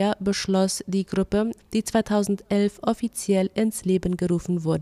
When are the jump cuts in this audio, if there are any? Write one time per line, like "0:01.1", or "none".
0:01.6